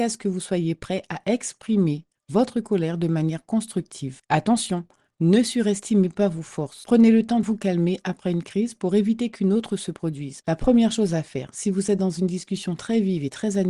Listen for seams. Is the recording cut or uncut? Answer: cut